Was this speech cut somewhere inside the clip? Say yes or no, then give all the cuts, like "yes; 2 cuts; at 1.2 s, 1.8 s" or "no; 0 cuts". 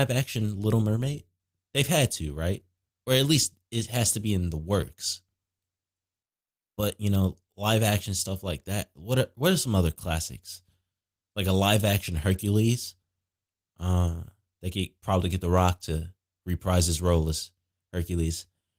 no; 0 cuts